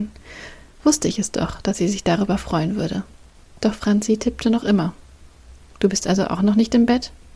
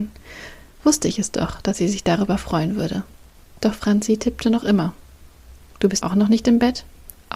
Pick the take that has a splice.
second; 1 cut; at 6.0 s

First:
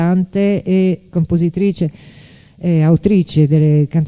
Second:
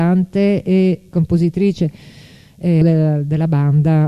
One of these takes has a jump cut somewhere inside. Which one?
second; 1 cut; at 2.8 s

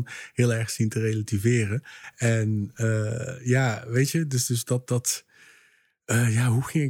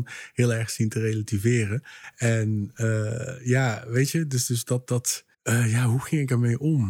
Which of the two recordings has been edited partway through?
second; 1 cut; at 5.3 s

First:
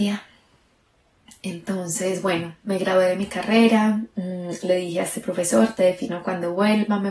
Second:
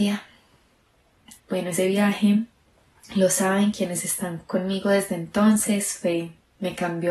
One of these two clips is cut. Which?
second; 1 cut; at 1.4 s

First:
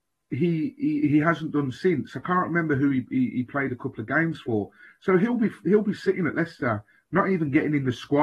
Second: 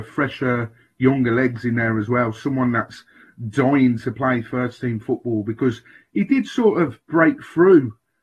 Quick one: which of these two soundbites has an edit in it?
second; 1 cut; at 7.0 s

